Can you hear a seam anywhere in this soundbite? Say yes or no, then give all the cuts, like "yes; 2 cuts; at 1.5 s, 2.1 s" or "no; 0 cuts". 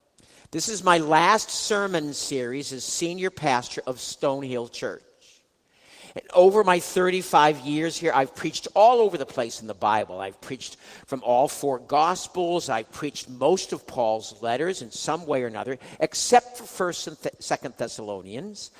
no; 0 cuts